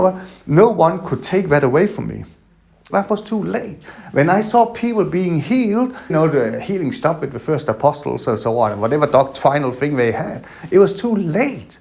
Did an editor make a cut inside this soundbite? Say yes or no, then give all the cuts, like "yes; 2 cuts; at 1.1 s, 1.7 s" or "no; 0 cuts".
yes; 2 cuts; at 2.9 s, 6.1 s